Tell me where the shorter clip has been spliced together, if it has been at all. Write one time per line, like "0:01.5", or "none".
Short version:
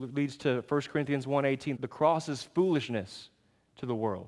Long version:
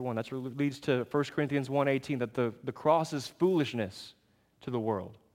0:01.8